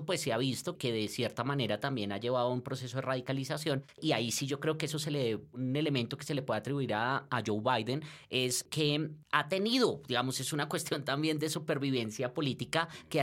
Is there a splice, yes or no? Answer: no